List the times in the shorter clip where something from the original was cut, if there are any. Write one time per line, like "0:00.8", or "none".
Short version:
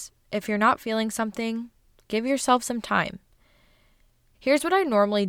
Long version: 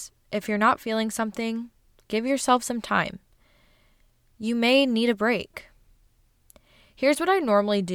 0:04.3